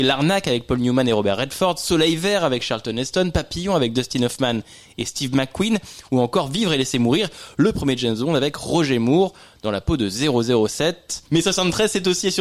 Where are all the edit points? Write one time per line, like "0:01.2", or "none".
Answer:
0:11.3